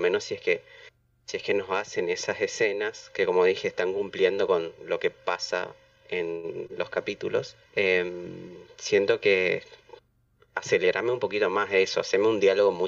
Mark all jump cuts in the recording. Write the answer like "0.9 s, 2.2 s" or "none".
7.7 s